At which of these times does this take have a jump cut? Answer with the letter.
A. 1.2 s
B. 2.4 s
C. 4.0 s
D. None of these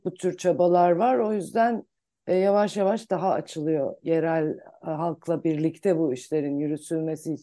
D